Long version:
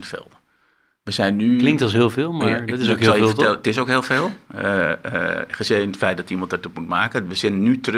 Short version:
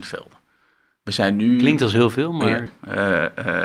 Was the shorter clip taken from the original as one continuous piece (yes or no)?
no